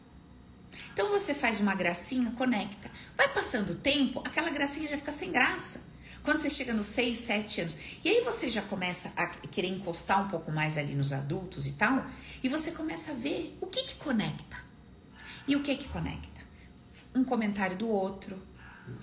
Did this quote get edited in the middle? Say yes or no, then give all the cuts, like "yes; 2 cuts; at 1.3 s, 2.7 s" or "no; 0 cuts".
no; 0 cuts